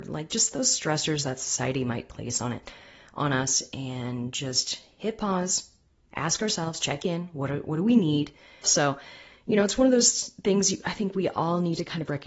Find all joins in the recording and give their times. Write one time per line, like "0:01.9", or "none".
0:08.6

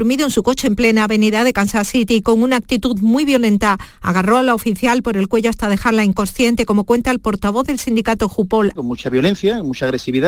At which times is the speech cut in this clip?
0:08.8

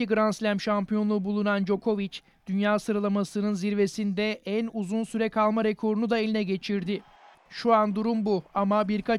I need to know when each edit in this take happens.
0:07.3

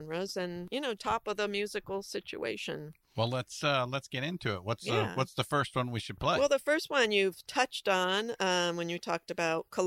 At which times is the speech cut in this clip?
0:01.0

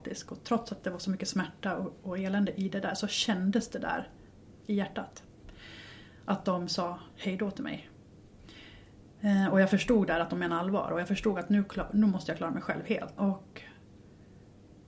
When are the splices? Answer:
0:04.6
0:13.2

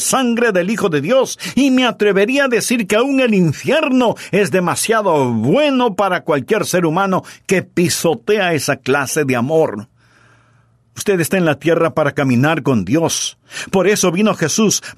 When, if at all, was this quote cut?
none

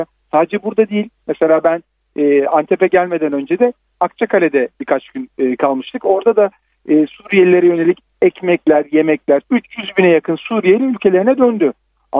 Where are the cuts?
0:09.4

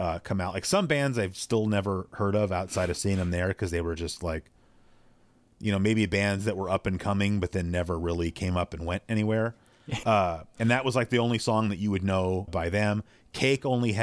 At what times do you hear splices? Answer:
0:10.0
0:12.5

